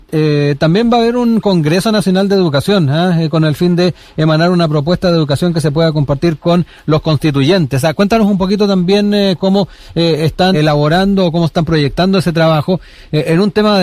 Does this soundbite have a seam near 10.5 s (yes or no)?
yes